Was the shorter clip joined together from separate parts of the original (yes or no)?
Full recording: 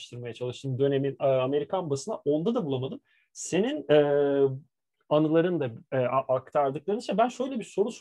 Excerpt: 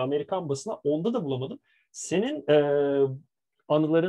no